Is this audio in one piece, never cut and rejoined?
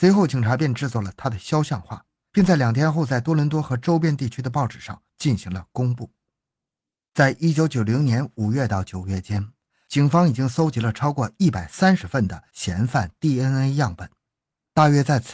yes; 0 cuts

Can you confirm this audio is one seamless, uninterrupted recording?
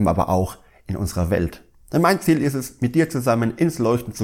yes; 0 cuts

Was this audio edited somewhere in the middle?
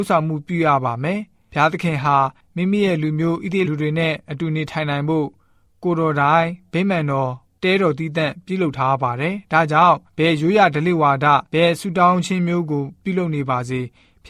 yes; 3 cuts; at 3.7 s, 10.1 s, 11.5 s

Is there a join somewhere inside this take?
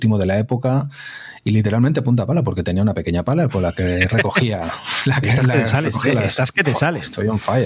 no; 0 cuts

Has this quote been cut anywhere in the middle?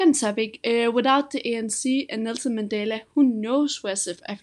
no; 0 cuts

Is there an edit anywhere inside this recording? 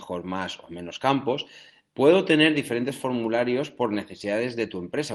yes; 1 cut; at 1.9 s

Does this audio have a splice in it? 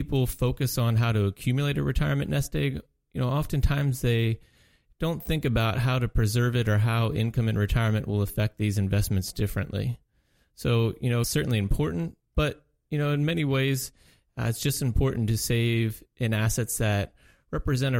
yes; 1 cut; at 11.2 s

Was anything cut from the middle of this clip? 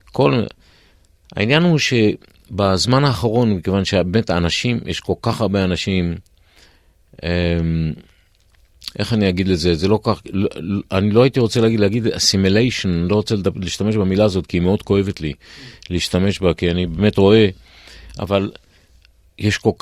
no; 0 cuts

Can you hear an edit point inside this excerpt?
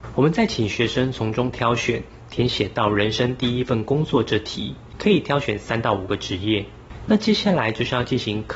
no; 0 cuts

